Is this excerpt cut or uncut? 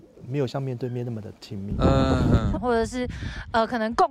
cut